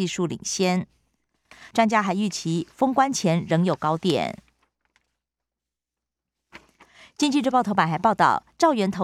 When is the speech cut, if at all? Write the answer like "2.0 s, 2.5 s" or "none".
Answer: 1.7 s

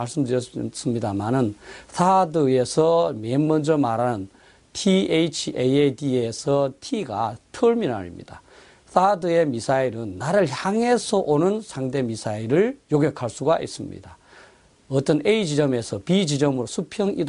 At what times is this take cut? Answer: 12.8 s

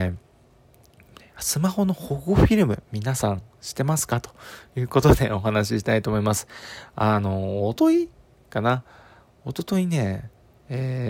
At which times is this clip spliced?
7.8 s

